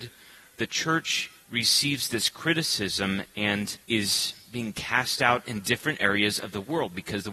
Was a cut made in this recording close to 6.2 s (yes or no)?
no